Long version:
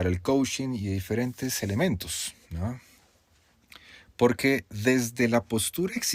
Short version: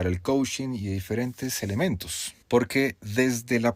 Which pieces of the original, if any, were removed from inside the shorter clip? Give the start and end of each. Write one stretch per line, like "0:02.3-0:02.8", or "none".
0:02.4-0:04.1